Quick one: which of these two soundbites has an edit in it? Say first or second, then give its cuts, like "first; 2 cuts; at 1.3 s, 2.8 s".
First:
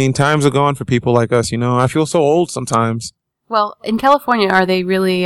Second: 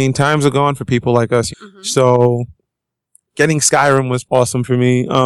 second; 2 cuts; at 1.5 s, 4.2 s